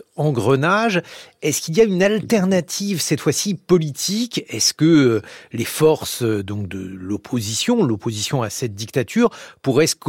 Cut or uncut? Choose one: uncut